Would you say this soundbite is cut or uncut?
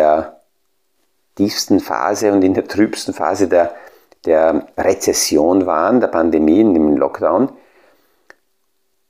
uncut